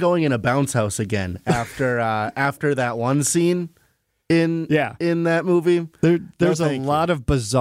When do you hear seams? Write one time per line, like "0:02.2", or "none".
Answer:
none